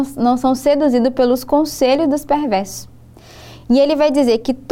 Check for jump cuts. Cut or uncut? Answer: uncut